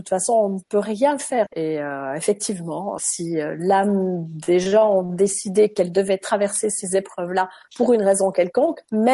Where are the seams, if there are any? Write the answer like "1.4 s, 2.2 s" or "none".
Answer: 1.5 s, 3.0 s